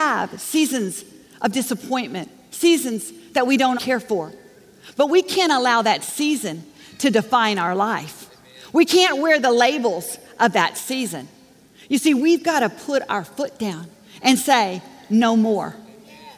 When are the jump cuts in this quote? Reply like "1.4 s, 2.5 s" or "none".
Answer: 3.8 s